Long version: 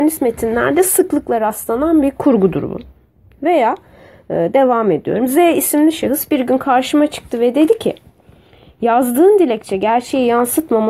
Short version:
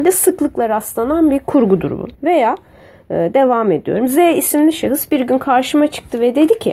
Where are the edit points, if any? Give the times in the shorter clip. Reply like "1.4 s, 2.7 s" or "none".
2.1 s